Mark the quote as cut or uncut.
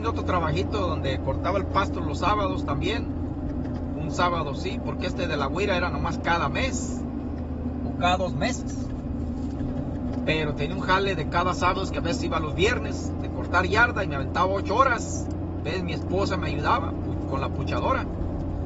uncut